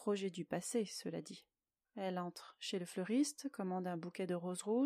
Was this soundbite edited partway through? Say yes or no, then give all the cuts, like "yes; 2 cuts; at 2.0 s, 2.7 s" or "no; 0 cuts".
yes; 1 cut; at 1.9 s